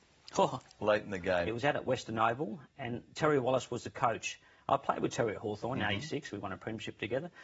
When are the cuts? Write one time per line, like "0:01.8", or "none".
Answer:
0:01.5